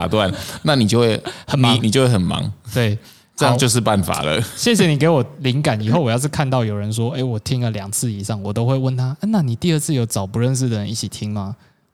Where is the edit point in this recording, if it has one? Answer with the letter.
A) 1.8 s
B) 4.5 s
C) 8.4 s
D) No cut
A